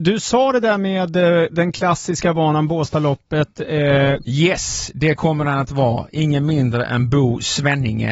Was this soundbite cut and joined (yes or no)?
yes